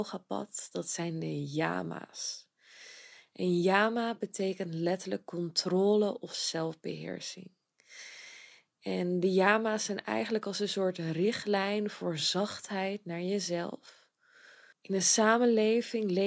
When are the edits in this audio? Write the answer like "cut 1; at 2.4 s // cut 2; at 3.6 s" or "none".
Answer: cut 1; at 14.7 s

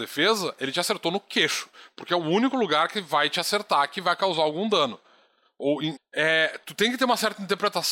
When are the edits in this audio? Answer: cut 1; at 6.0 s

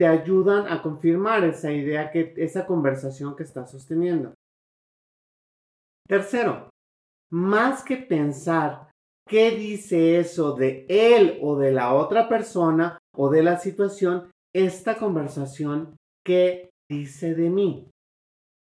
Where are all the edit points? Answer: cut 1; at 14.4 s

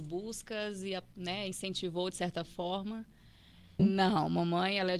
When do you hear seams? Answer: cut 1; at 3.8 s

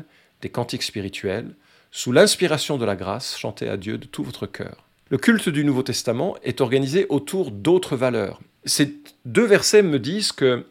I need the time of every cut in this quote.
cut 1; at 5.1 s // cut 2; at 8.6 s

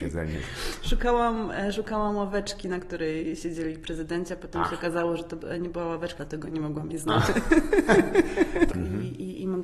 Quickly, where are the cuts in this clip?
cut 1; at 6.2 s // cut 2; at 8.7 s

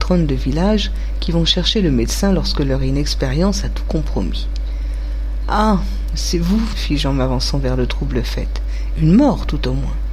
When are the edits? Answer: cut 1; at 6.7 s // cut 2; at 8.9 s

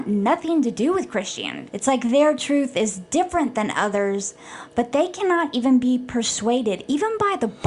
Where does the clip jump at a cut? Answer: cut 1; at 1.7 s

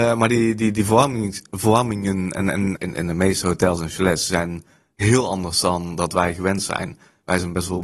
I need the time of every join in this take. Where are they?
cut 1; at 2.7 s

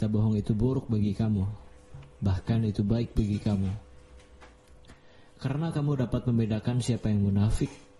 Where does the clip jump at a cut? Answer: none

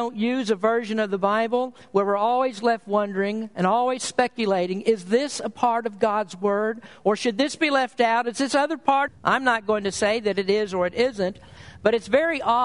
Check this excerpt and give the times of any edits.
cut 1; at 9.1 s

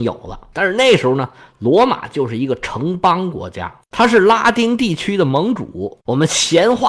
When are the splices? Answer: cut 1; at 6.0 s

